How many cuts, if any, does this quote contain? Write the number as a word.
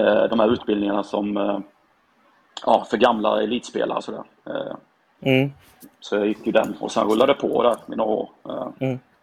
zero